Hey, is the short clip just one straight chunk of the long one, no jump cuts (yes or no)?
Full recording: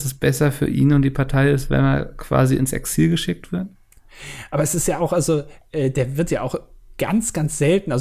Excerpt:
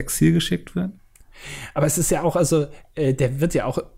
yes